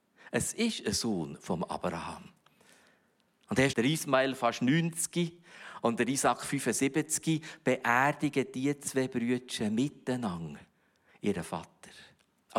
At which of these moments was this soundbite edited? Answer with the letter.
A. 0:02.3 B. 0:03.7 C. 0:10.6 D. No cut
B